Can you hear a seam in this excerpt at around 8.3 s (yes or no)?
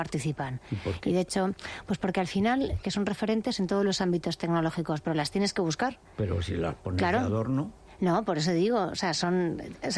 no